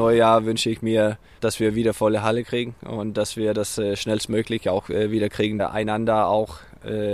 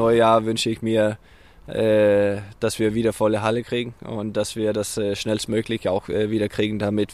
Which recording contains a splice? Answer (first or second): first